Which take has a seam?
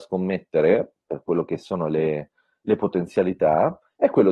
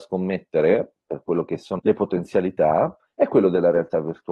second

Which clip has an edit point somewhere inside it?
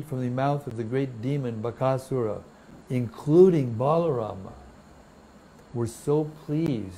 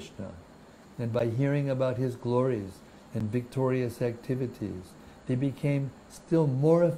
first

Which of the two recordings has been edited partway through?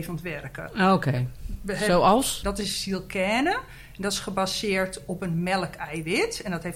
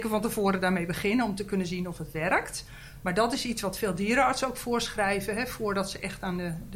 first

